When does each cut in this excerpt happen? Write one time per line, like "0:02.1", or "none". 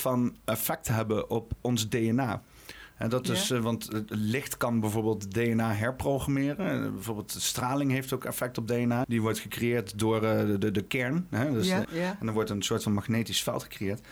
0:09.0
0:11.8